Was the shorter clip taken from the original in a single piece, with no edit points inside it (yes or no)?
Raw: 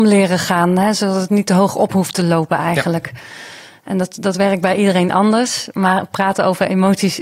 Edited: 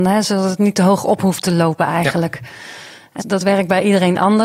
no